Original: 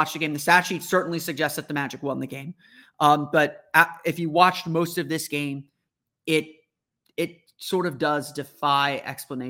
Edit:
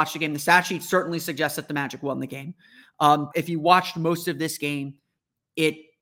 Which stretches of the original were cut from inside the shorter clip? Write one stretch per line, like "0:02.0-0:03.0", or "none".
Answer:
0:03.3-0:04.0